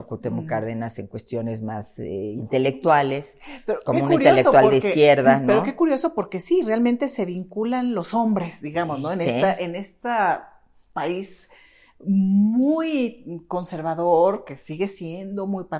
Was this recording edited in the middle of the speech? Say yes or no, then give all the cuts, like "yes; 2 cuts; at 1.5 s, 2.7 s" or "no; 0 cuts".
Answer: no; 0 cuts